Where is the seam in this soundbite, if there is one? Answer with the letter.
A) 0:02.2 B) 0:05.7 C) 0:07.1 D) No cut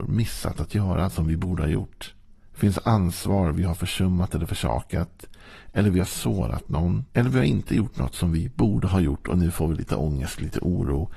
C